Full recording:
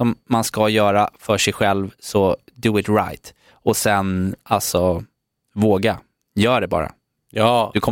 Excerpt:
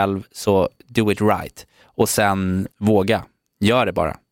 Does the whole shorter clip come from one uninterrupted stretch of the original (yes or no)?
no